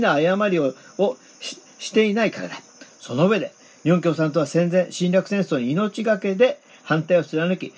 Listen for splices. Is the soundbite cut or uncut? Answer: cut